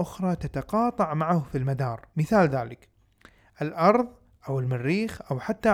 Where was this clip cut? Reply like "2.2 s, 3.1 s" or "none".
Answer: 2.1 s

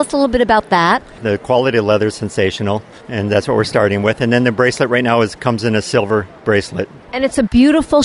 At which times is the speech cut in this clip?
1.2 s, 3.0 s

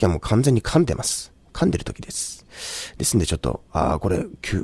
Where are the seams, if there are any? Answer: none

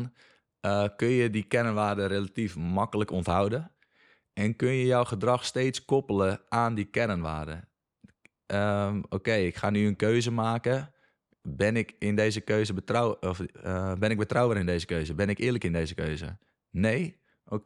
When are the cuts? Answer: none

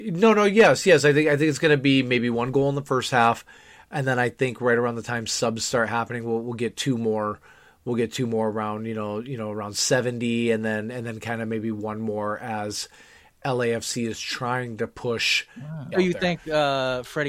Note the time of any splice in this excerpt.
15.9 s

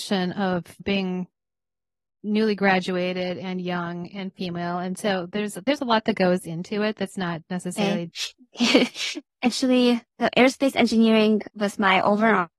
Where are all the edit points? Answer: 8.1 s, 10.1 s

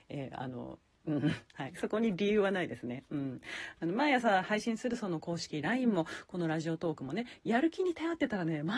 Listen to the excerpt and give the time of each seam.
1.5 s

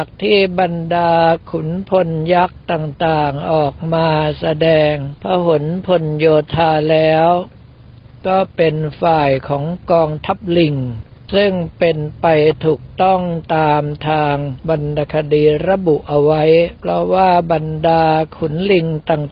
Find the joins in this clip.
16.8 s

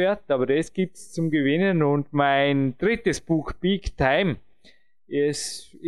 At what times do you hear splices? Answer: none

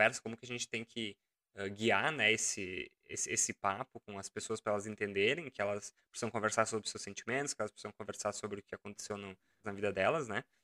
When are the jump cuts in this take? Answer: 9.6 s

